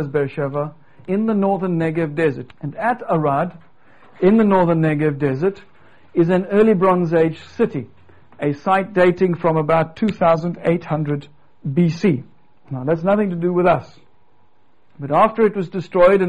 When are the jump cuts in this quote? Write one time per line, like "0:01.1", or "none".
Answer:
0:01.0
0:02.5